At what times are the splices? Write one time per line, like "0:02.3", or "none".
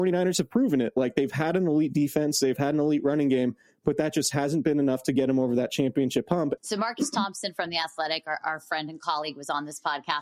0:06.6